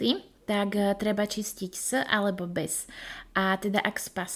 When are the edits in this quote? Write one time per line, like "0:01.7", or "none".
none